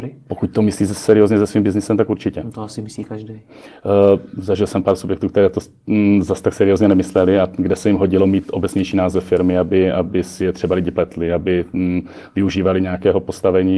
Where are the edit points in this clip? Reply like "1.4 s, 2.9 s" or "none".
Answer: none

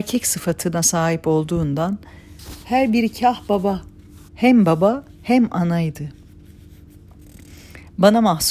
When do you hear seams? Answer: 4.3 s

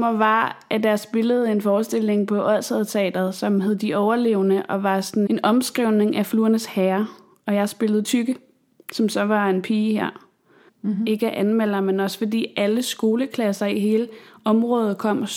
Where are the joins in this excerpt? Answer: 5.3 s, 10.7 s

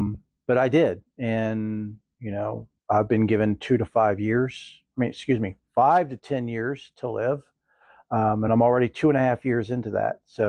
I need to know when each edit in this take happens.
2.8 s

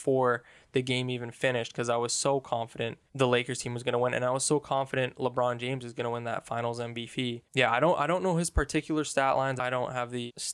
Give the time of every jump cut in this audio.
none

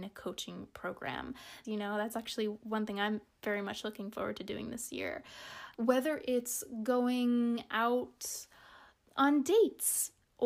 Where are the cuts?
1.6 s, 5.7 s

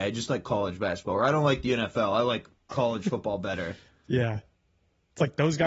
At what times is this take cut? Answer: 2.7 s

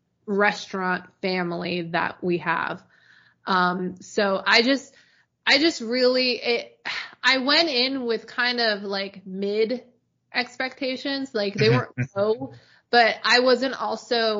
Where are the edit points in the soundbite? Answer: none

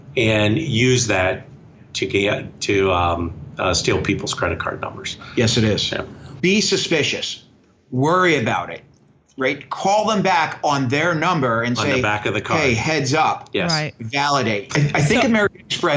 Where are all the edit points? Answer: 6.4 s, 14.7 s

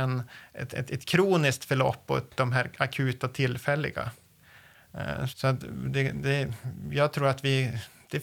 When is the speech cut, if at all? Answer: 5.3 s

